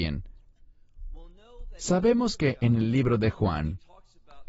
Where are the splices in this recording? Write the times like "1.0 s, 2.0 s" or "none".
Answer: none